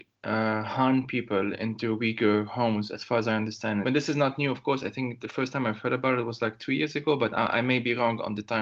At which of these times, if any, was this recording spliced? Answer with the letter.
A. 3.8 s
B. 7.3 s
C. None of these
A